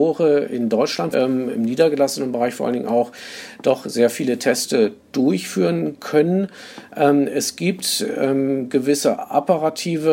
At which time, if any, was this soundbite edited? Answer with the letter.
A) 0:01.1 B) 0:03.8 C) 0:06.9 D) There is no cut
A